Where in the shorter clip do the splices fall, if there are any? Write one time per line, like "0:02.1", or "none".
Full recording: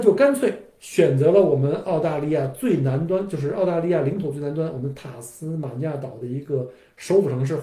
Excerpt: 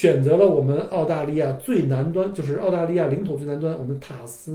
none